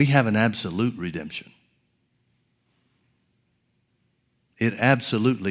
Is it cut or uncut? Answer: uncut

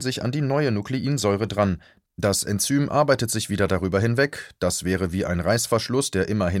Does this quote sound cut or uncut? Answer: uncut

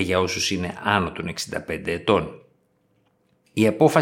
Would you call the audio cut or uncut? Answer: uncut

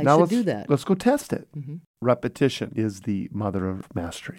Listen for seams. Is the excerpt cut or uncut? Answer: cut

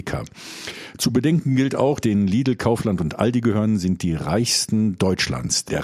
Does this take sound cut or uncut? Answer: cut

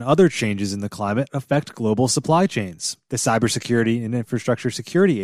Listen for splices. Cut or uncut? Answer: uncut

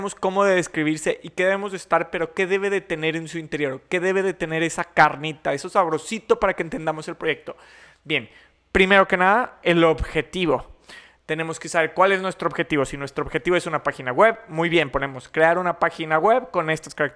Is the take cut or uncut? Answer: uncut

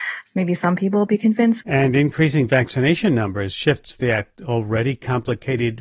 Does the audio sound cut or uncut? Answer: cut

